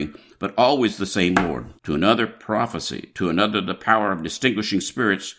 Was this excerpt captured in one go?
no; 1 cut; at 1.8 s

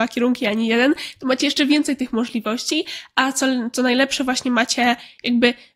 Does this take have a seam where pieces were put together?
no; 0 cuts

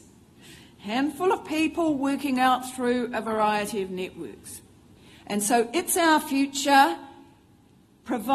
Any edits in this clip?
yes; 1 cut; at 5.1 s

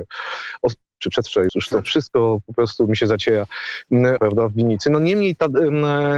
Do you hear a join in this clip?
yes; 2 cuts; at 1.5 s, 4.2 s

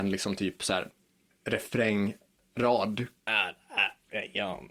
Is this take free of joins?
yes; 0 cuts

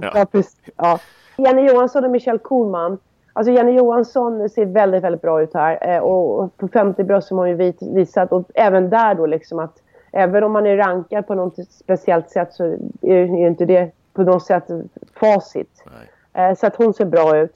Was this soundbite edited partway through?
yes; 1 cut; at 1.4 s

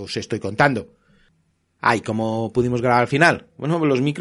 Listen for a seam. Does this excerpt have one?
no; 0 cuts

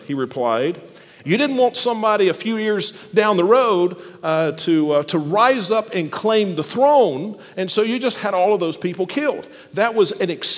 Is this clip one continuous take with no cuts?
no; 1 cut; at 1.2 s

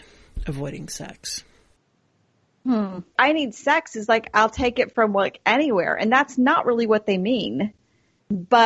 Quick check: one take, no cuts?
no; 1 cut; at 3.2 s

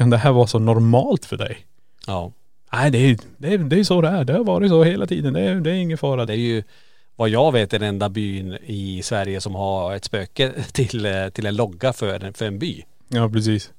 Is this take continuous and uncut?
no; 1 cut; at 6.3 s

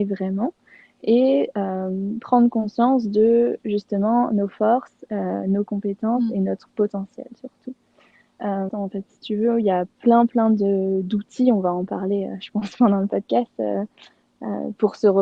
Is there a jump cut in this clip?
yes; 1 cut; at 8.7 s

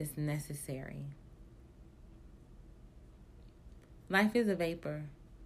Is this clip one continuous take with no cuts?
yes; 0 cuts

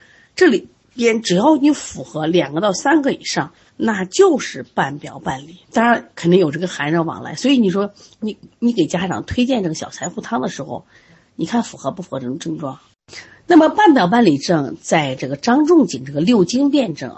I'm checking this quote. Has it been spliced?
yes; 1 cut; at 5.6 s

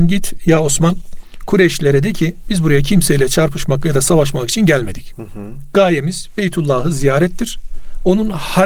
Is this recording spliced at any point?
no; 0 cuts

